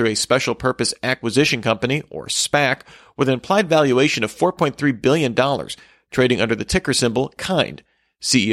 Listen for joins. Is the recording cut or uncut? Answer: uncut